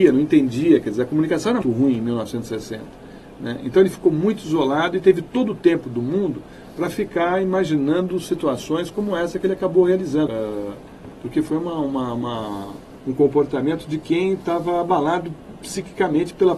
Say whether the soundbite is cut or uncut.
cut